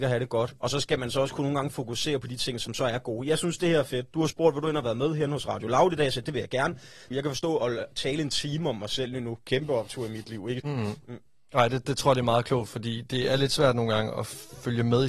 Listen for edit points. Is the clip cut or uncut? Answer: cut